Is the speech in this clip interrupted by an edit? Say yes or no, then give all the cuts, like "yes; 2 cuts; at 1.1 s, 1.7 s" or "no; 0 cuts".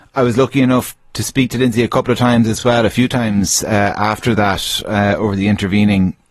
no; 0 cuts